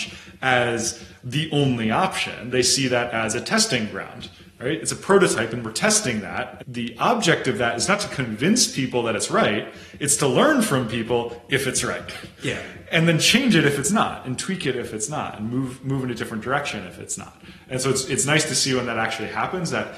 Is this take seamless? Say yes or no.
no